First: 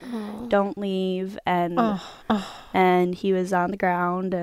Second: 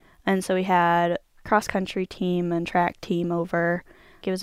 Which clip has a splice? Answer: first; 1 cut; at 2.2 s

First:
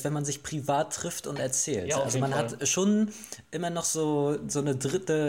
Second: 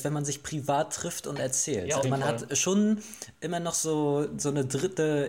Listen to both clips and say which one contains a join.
second; 1 cut; at 2.0 s

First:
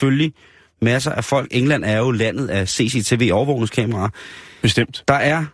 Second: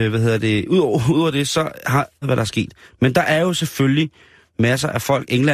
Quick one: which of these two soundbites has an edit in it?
second; 1 cut; at 2.2 s

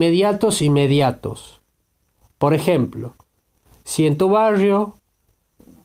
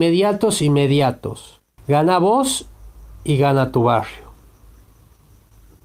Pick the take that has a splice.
second; 1 cut; at 1.8 s

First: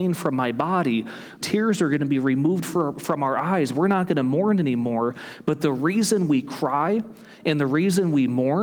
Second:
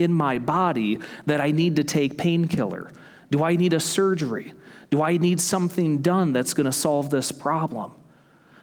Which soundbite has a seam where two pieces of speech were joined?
first; 1 cut; at 1.4 s

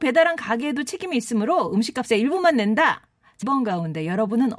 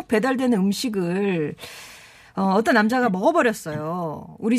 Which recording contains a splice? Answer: first; 1 cut; at 3.4 s

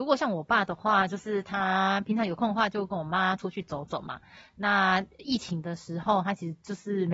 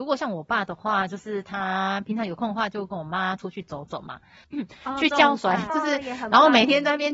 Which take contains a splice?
second; 2 cuts; at 4.4 s, 5.7 s

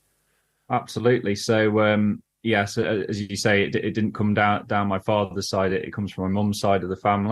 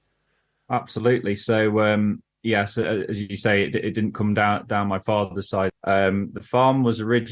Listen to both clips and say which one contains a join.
second; 1 cut; at 5.7 s

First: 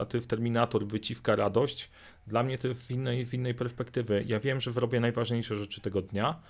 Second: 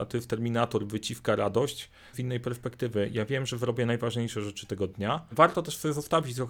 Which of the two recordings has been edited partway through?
second; 2 cuts; at 2.1 s, 5.3 s

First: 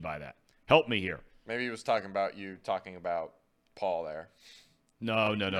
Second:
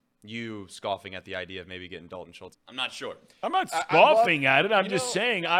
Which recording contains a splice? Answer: second; 1 cut; at 2.5 s

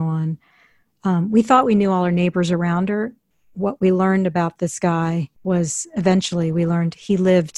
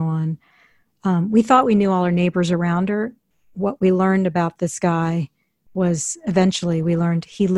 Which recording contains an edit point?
first; 1 cut; at 5.3 s

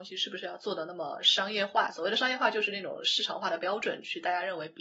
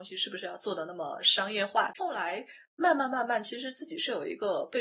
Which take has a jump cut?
second; 1 cut; at 1.9 s

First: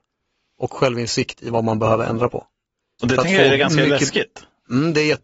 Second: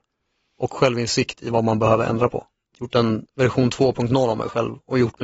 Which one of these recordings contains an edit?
second; 1 cut; at 2.7 s

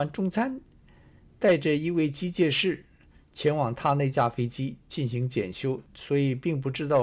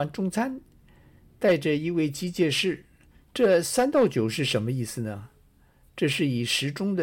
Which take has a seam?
second; 1 cut; at 3.3 s

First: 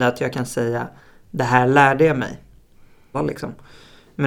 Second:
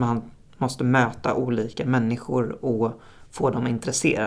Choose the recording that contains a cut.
first; 1 cut; at 3.1 s

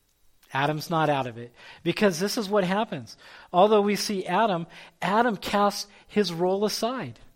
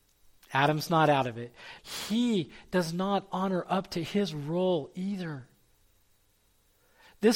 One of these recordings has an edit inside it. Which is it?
second; 1 cut; at 1.8 s

